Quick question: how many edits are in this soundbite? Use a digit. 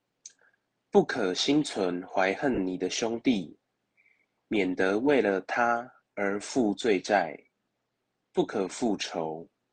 1